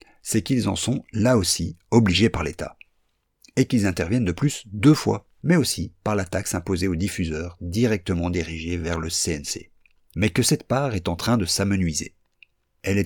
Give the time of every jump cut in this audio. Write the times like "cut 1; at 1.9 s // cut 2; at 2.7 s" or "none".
cut 1; at 5.4 s // cut 2; at 10.1 s